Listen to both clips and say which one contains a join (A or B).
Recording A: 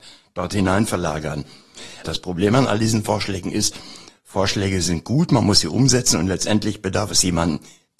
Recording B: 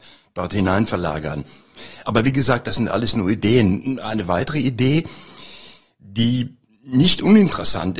A